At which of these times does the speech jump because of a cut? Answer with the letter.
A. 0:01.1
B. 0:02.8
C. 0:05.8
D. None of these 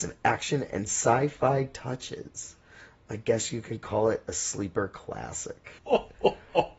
C